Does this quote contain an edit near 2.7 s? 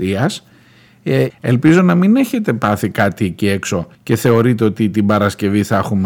no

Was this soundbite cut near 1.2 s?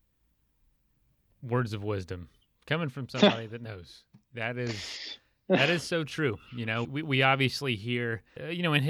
no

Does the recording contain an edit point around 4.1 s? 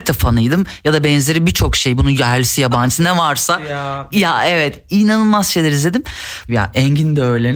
yes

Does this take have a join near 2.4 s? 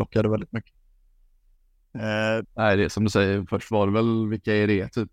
yes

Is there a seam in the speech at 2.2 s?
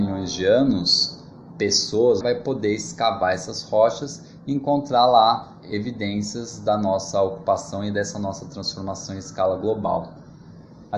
yes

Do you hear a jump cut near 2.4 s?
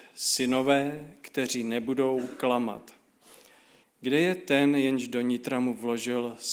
no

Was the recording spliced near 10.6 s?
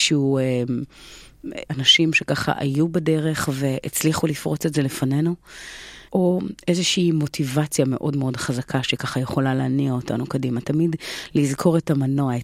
no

